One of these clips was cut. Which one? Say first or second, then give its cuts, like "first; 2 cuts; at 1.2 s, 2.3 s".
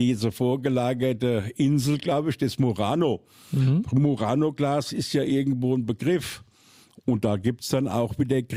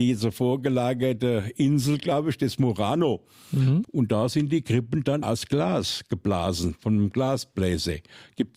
second; 2 cuts; at 3.8 s, 5.2 s